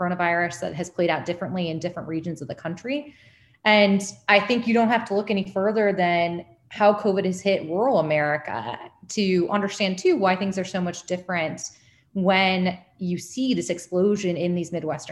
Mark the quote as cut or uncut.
uncut